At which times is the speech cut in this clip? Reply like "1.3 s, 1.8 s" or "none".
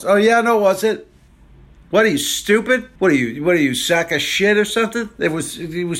3.0 s